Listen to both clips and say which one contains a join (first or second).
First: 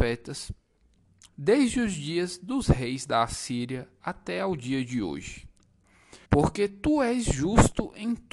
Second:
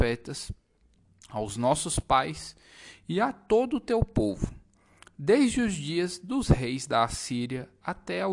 first